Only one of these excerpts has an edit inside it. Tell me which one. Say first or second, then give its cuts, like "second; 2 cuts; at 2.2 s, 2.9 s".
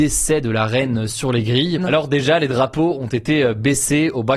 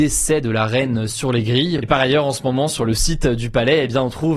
first; 1 cut; at 1.8 s